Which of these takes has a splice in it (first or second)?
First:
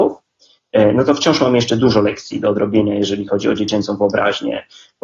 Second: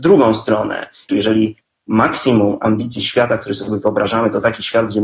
second